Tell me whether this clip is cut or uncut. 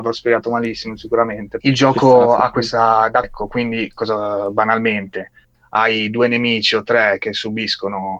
cut